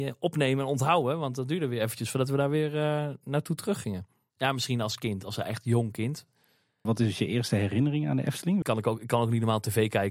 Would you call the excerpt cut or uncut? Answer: cut